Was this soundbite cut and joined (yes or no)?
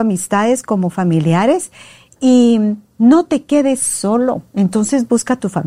no